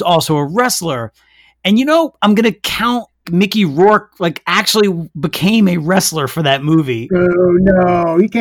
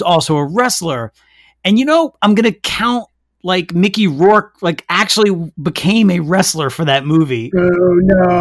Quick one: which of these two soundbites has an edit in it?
first; 1 cut; at 3.2 s

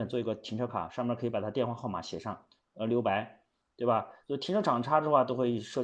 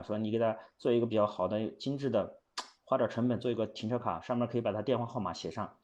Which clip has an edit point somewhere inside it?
first; 1 cut; at 4.2 s

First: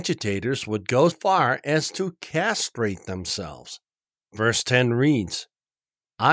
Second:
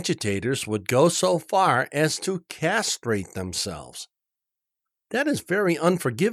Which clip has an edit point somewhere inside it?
first; 2 cuts; at 1.1 s, 4.2 s

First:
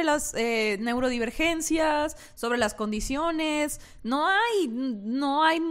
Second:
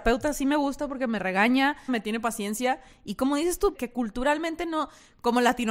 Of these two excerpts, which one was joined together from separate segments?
second; 2 cuts; at 1.9 s, 3.7 s

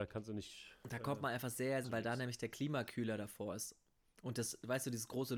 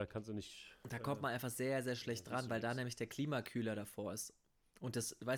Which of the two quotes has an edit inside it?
first; 1 cut; at 1.8 s

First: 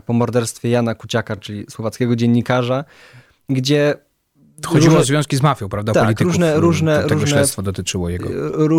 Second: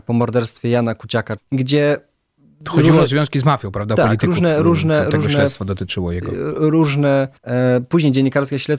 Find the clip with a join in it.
second; 2 cuts; at 1.4 s, 7.4 s

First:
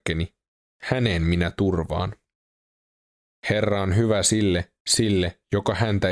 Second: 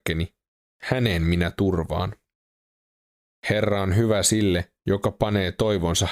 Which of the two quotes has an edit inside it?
first; 1 cut; at 4.8 s

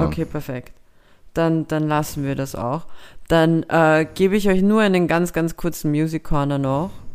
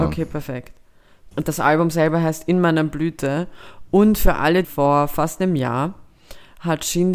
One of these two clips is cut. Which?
second; 2 cuts; at 1.3 s, 4.6 s

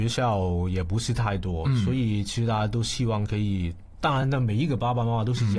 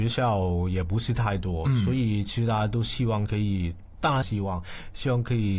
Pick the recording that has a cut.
second; 1 cut; at 4.2 s

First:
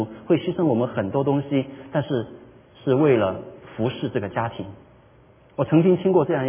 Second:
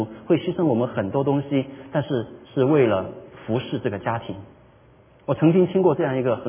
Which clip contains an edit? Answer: second; 1 cut; at 2.4 s

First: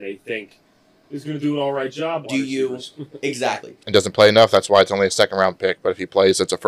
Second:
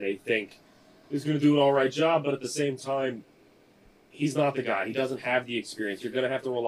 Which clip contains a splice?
first; 2 cuts; at 2.2 s, 3.8 s

